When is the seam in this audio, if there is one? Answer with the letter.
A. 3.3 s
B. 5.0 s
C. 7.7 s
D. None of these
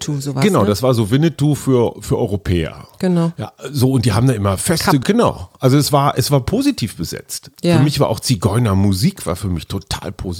B